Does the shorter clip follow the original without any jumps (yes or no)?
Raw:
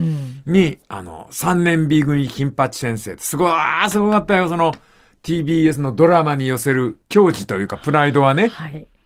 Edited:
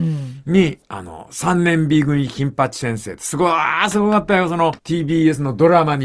no